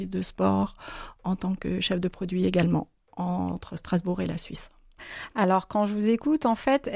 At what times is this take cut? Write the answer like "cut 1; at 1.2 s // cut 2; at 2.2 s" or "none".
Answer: none